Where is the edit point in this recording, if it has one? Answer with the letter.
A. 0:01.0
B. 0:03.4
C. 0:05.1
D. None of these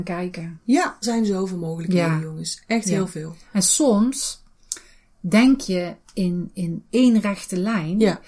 A